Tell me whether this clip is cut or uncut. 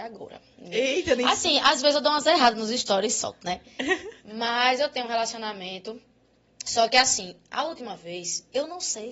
uncut